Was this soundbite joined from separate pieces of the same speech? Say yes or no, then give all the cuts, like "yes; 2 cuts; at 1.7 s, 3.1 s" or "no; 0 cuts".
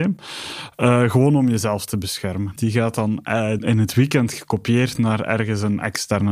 yes; 2 cuts; at 2.6 s, 3.6 s